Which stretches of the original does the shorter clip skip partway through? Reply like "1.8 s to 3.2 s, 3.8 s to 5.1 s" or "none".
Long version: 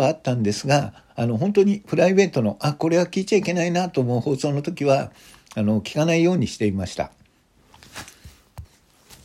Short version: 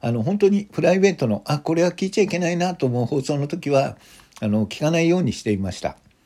none